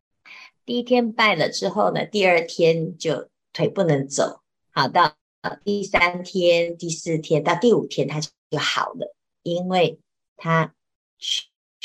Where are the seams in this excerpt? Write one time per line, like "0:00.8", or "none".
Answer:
0:05.6
0:09.3